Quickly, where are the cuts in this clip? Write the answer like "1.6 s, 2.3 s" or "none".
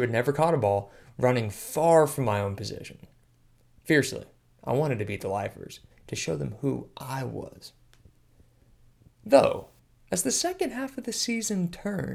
5.9 s